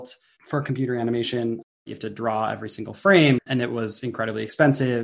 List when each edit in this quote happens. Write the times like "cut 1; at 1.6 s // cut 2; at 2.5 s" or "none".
cut 1; at 1.8 s // cut 2; at 3.4 s

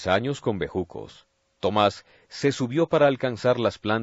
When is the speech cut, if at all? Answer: none

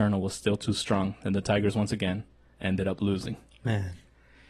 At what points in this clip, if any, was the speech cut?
none

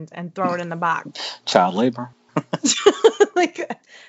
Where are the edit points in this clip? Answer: cut 1; at 2.3 s

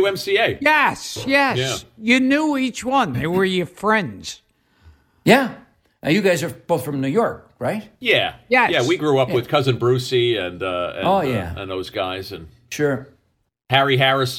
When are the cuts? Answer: none

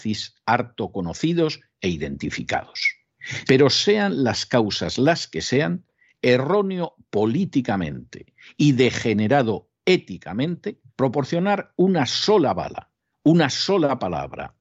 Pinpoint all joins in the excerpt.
cut 1; at 3.4 s // cut 2; at 6.1 s // cut 3; at 10.9 s

